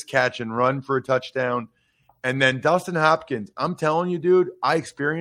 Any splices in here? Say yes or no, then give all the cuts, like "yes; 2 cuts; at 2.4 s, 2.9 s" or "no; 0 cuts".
no; 0 cuts